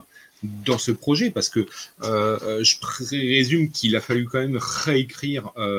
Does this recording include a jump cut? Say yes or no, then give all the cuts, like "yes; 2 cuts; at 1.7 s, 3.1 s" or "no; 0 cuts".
no; 0 cuts